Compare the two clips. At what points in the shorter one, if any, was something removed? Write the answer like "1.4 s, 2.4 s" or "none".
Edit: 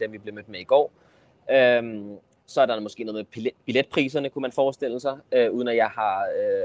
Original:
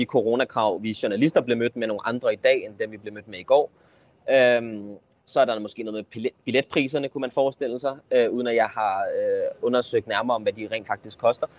none

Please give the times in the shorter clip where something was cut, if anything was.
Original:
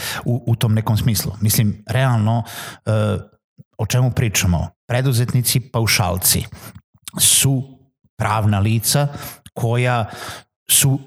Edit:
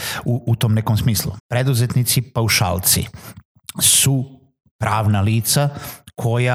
1.4 s

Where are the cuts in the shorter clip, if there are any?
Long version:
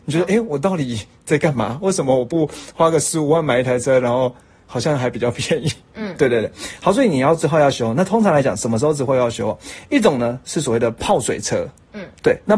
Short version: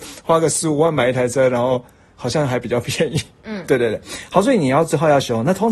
none

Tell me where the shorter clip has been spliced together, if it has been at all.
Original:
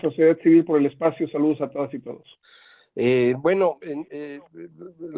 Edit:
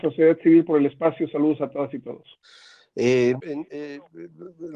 3.4 s

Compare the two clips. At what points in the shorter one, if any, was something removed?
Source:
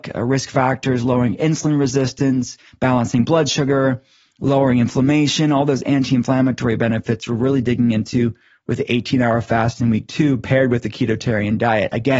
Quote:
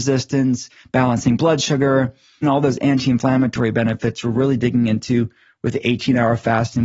2.4 s

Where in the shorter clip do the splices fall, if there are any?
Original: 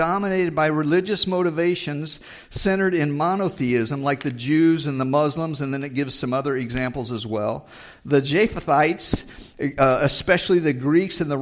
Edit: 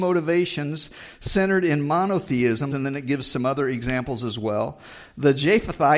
2.7 s

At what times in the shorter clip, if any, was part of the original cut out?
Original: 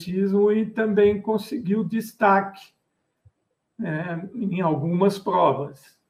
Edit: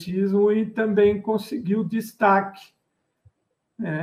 none

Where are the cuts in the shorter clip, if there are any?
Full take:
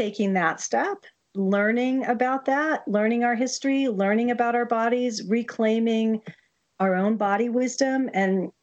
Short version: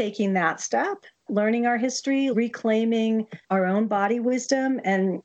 1.3 s, 2.3 s, 3.4 s

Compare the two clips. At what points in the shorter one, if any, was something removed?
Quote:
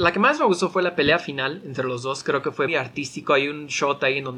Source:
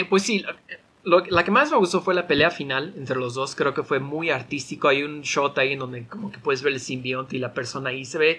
2.7 s

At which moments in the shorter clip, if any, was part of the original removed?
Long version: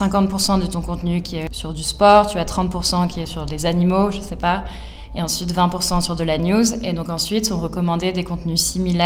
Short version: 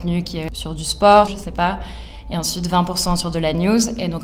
1.3 s

